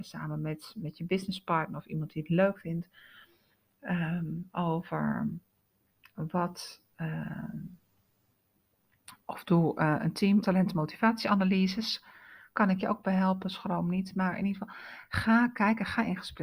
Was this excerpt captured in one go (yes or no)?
no